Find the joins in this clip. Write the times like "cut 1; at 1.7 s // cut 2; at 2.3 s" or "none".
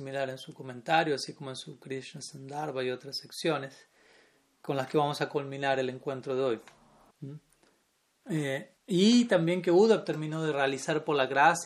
cut 1; at 7.1 s // cut 2; at 8.8 s